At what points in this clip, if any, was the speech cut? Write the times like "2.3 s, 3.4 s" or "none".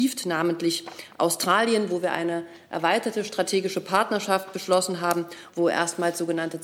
5.5 s